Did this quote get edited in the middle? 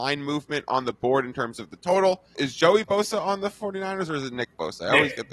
yes; 1 cut; at 2.3 s

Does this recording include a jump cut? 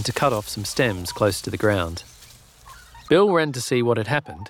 yes; 1 cut; at 3.1 s

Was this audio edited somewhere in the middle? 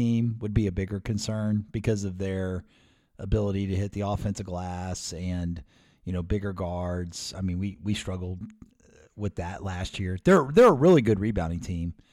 no; 0 cuts

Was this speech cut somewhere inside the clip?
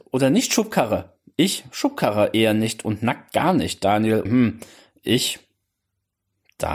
yes; 1 cut; at 4.3 s

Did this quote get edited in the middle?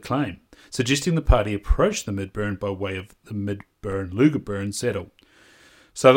no; 0 cuts

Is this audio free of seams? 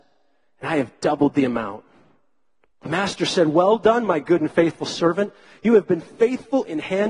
yes; 0 cuts

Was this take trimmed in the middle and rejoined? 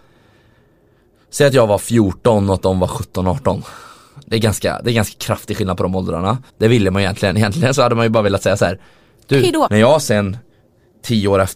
yes; 2 cuts; at 6.5 s, 9.7 s

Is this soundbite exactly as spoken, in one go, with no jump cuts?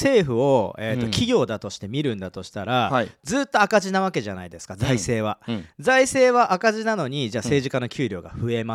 yes; 0 cuts

